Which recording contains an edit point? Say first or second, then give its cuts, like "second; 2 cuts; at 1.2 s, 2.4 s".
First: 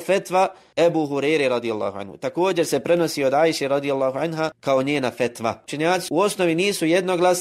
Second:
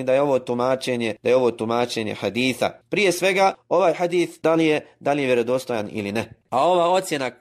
second; 1 cut; at 6.4 s